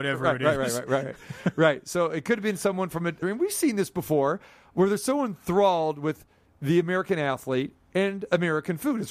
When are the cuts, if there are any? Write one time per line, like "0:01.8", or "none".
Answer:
0:03.2